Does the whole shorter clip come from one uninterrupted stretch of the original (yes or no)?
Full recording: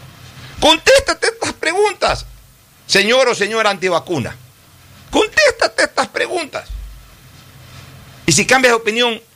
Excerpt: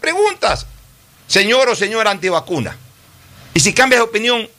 no